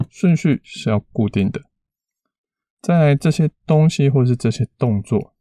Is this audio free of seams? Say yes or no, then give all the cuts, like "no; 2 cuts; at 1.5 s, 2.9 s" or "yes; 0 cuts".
yes; 0 cuts